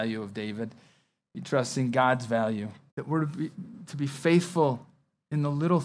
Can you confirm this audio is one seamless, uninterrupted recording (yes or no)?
no